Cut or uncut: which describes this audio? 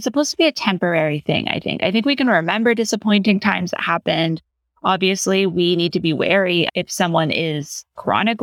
uncut